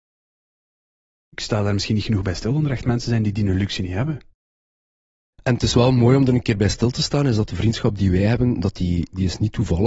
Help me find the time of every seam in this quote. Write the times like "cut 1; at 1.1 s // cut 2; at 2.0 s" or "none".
none